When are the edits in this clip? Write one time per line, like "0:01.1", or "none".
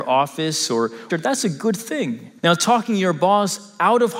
0:01.1
0:02.4

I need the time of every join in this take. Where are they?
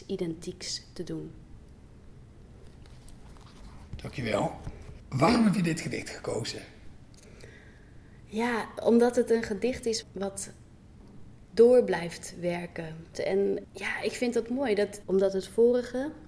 0:10.0
0:13.1
0:15.0

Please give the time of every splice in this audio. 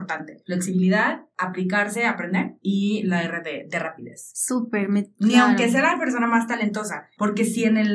0:05.1

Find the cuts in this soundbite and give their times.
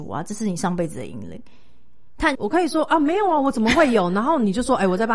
0:02.3

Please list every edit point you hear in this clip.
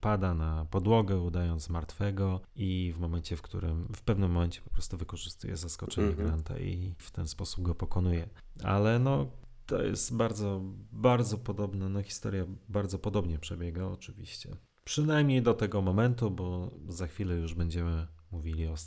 none

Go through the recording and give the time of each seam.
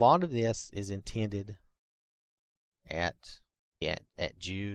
0:03.8

